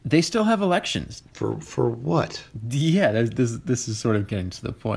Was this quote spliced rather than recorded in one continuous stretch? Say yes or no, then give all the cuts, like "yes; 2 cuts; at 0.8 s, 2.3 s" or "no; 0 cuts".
yes; 1 cut; at 1.2 s